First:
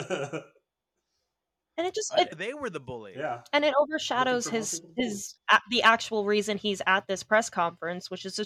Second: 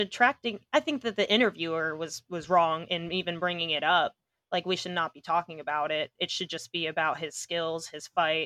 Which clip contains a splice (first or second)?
first